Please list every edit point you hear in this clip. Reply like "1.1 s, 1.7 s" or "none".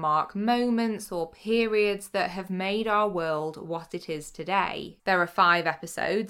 5.0 s